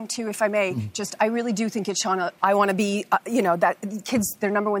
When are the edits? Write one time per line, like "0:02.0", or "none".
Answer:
0:02.4